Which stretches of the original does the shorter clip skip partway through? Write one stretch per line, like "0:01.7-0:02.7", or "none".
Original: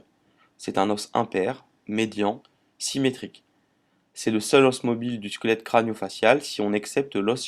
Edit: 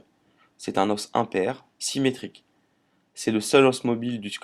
0:01.7-0:02.7